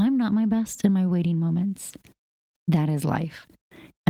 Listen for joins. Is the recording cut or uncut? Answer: cut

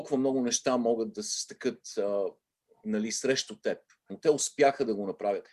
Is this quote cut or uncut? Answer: cut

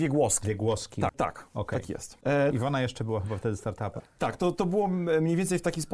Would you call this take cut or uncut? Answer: cut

